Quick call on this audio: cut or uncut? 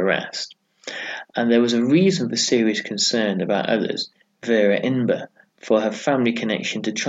cut